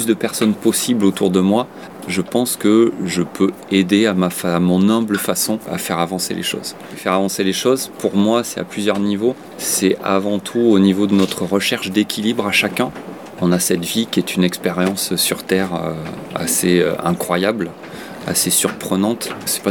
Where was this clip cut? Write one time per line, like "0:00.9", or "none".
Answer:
none